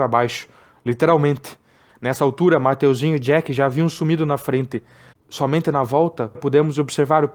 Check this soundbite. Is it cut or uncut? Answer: cut